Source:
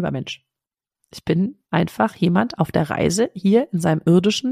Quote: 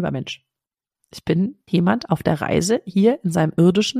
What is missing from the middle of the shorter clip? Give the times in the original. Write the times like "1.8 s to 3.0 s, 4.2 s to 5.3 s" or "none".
1.7 s to 2.2 s